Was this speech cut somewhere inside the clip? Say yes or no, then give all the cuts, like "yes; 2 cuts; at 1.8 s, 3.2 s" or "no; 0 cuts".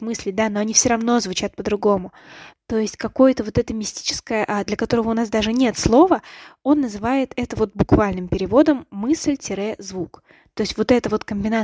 yes; 2 cuts; at 2.5 s, 4.7 s